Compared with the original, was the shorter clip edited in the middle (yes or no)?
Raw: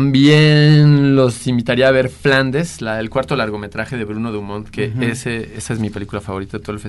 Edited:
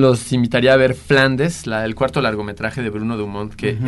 no